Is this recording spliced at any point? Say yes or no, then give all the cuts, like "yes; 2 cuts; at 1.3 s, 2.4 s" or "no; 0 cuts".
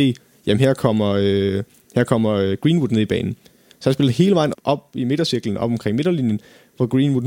yes; 1 cut; at 4.5 s